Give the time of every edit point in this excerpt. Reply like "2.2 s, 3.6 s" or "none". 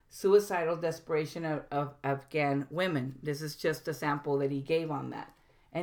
none